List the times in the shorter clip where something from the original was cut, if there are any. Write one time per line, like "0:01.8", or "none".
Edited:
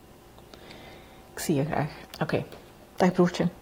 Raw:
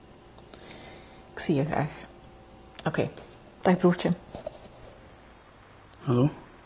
0:02.0